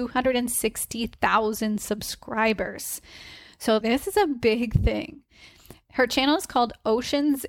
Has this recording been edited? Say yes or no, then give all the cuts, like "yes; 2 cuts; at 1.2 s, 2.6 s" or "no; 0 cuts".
yes; 1 cut; at 3.8 s